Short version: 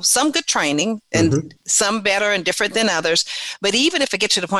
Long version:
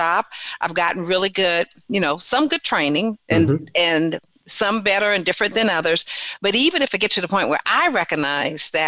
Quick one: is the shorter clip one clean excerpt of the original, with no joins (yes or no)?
no